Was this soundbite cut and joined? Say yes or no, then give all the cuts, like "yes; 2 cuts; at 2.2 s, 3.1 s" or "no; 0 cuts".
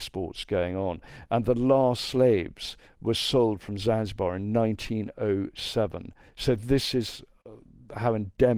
no; 0 cuts